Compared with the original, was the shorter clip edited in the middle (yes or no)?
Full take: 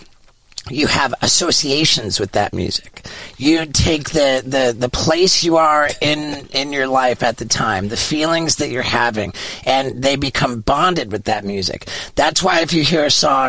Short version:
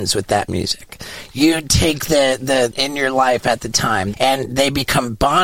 yes